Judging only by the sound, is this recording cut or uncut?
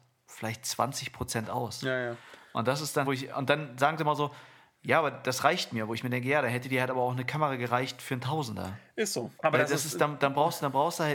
cut